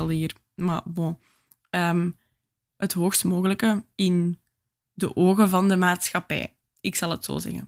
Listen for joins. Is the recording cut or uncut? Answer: uncut